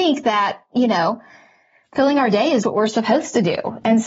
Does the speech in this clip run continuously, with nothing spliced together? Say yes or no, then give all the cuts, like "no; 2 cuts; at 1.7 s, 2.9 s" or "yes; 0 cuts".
no; 1 cut; at 2.6 s